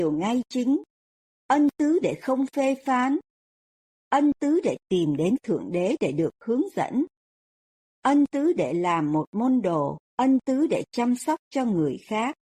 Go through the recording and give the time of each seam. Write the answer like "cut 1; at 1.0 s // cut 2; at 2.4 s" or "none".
cut 1; at 10.0 s